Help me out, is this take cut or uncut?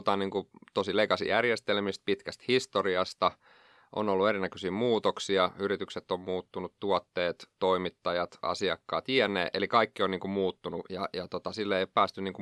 cut